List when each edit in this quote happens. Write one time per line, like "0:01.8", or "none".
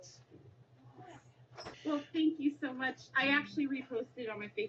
0:01.7

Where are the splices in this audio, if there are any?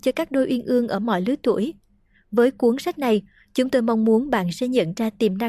none

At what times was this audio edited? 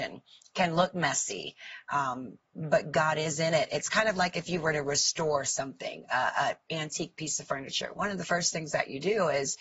none

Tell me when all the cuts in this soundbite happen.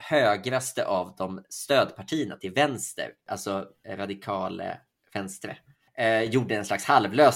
none

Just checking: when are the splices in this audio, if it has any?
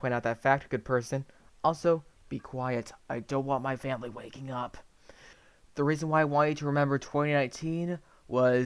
none

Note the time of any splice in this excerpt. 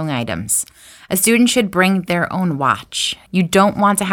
none

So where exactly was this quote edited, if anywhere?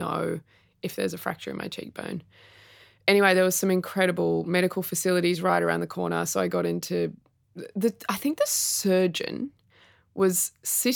0:07.4

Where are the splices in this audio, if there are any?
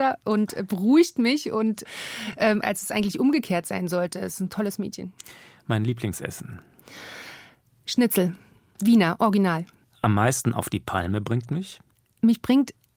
none

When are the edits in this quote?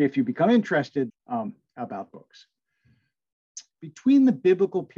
0:01.1
0:03.8

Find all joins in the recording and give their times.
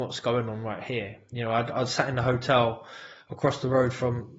none

